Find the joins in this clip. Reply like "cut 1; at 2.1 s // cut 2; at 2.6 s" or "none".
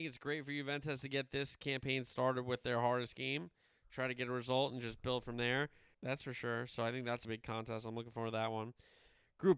cut 1; at 5.9 s // cut 2; at 7.2 s